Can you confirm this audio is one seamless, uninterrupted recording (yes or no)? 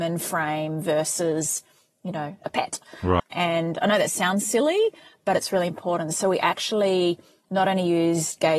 no